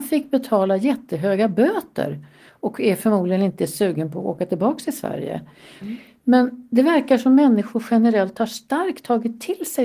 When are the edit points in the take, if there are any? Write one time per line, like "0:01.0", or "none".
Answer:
0:05.8